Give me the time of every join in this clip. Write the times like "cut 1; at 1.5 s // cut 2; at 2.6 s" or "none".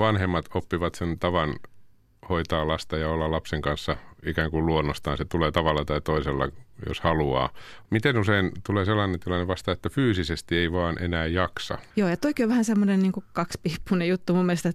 cut 1; at 7.9 s // cut 2; at 11.9 s